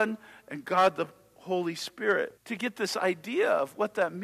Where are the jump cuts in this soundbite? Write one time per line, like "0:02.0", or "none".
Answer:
0:02.4